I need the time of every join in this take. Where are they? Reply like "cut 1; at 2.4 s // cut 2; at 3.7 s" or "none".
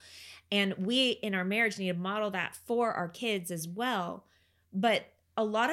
none